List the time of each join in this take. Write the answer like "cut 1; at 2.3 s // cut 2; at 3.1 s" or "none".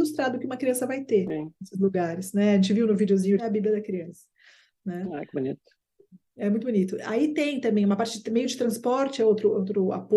cut 1; at 3.4 s